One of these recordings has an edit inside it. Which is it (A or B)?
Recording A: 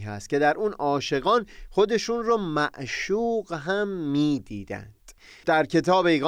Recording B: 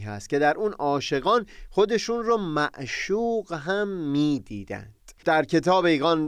B